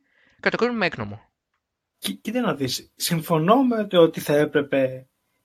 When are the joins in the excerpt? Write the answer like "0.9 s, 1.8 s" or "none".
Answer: 1.9 s